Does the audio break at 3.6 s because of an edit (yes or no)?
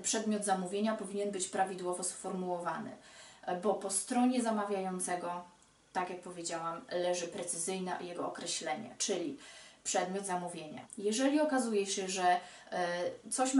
no